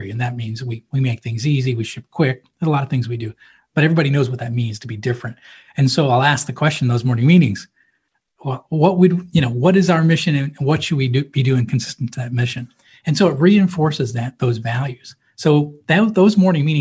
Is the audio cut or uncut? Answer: uncut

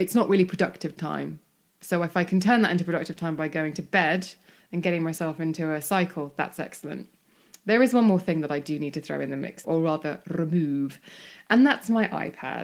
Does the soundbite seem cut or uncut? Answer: cut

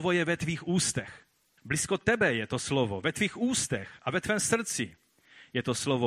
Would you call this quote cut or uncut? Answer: cut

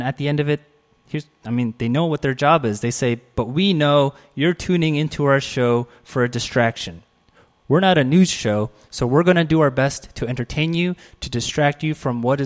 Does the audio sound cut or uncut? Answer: uncut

